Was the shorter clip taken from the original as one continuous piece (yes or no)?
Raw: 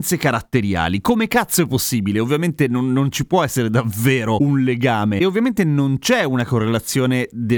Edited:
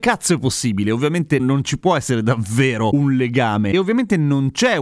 no